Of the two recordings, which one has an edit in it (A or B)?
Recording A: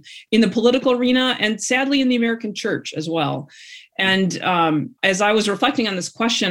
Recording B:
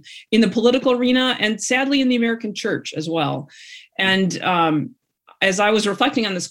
A